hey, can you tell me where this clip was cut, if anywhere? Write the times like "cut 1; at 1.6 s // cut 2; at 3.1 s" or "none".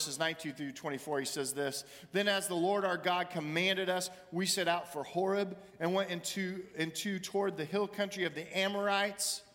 none